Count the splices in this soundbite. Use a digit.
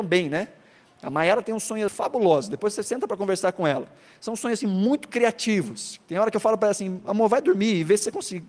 1